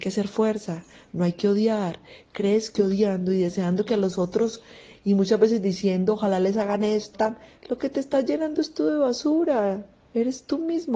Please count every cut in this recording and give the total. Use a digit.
1